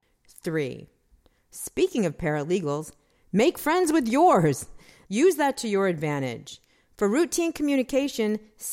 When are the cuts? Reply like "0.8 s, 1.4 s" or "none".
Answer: 5.1 s